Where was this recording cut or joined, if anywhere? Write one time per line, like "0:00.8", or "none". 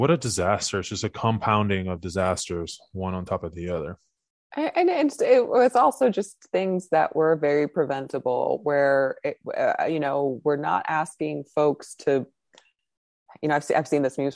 none